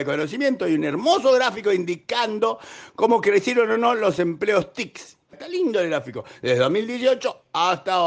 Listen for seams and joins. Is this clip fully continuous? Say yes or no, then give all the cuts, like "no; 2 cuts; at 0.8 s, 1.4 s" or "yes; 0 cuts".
no; 1 cut; at 5.3 s